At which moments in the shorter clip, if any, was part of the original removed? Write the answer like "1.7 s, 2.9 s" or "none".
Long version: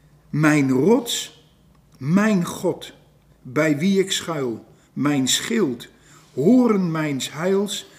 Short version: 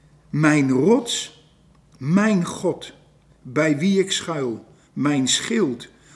none

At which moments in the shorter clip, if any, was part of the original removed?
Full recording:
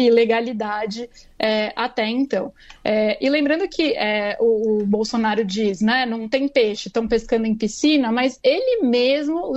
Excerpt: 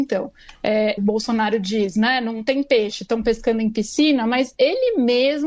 1.0 s

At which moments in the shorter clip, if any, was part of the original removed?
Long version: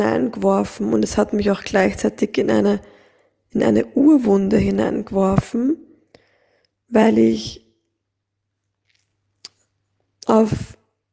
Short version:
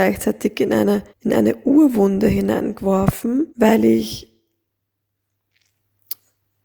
1.1 s, 3.5 s

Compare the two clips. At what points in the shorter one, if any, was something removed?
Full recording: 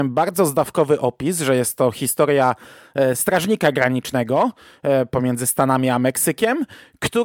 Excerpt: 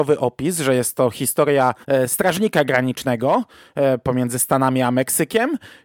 1.8 s

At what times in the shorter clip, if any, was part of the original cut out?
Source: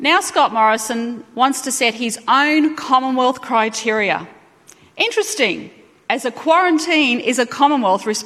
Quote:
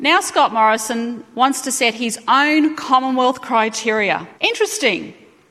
4.3 s

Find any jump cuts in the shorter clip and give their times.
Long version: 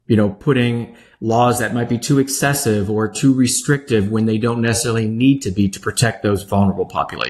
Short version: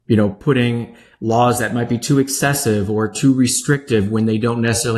none

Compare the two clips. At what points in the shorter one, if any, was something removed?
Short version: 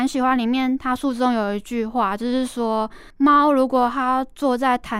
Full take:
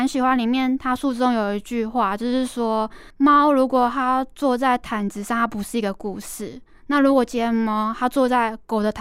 none

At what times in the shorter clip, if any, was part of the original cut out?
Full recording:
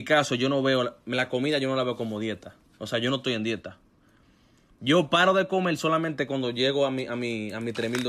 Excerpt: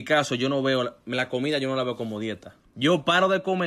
2.6 s

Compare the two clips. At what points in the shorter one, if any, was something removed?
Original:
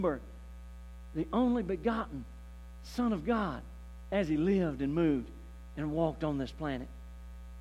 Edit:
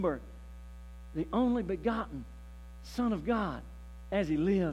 none

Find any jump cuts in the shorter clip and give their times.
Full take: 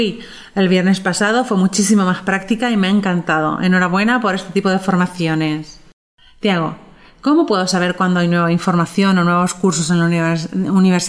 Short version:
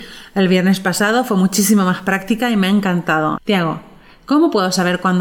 3.4 s

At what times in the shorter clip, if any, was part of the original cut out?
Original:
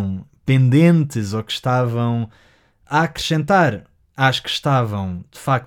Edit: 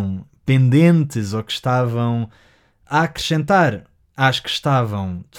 none

